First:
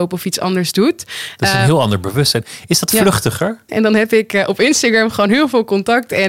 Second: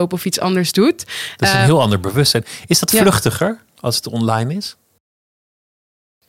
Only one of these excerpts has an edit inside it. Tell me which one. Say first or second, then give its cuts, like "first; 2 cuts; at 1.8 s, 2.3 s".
first; 1 cut; at 3.7 s